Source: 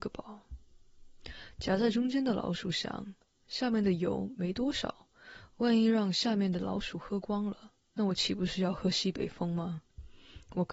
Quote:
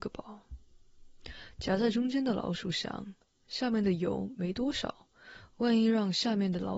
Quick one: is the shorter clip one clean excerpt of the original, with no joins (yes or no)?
yes